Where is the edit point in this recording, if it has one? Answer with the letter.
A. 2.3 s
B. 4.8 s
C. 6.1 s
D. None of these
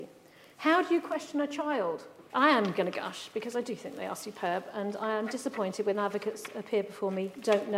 A